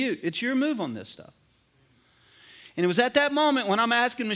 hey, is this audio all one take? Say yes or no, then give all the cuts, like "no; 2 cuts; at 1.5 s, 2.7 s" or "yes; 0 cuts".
yes; 0 cuts